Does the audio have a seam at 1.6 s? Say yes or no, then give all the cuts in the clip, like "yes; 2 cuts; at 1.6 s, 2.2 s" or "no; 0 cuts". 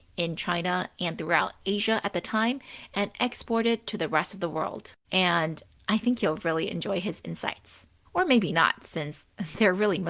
no; 2 cuts; at 5.0 s, 8.0 s